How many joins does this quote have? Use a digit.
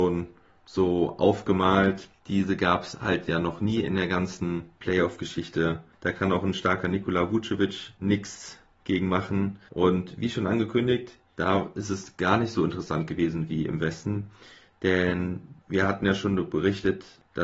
3